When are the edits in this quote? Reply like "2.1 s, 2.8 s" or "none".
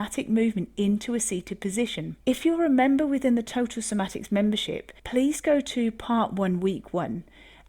2.2 s, 5.0 s